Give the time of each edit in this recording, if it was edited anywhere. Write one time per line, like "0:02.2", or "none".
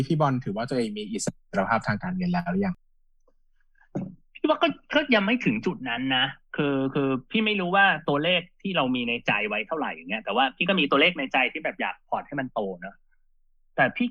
none